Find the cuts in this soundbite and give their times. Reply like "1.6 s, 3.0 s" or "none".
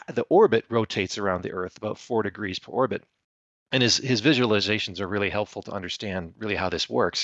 none